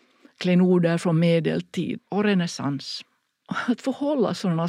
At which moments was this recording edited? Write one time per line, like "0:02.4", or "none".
0:02.0